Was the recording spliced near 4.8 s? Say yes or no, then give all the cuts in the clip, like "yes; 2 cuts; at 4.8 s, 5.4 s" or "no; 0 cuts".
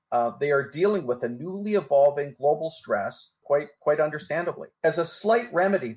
yes; 2 cuts; at 3.4 s, 4.8 s